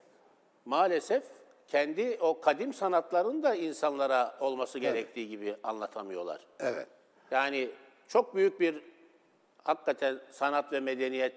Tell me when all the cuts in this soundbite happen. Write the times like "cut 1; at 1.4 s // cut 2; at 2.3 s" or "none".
none